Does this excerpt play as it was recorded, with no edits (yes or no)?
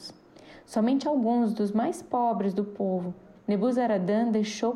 no